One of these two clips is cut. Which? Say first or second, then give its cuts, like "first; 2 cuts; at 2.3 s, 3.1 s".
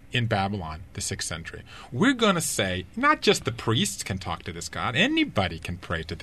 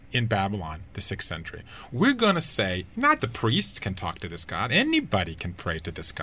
second; 1 cut; at 3.2 s